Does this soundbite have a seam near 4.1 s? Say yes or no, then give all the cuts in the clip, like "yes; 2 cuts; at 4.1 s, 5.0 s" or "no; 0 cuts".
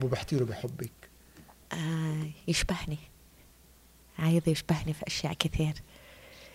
no; 1 cut; at 1.6 s